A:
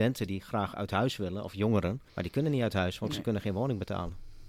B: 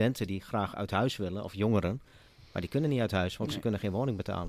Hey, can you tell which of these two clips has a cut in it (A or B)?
A